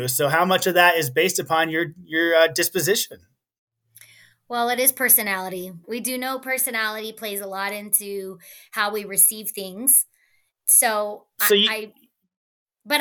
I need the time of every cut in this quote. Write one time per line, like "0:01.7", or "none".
0:05.8
0:10.5